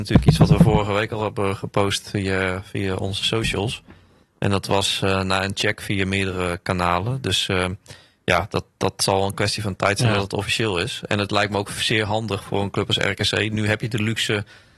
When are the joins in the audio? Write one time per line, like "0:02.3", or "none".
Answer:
none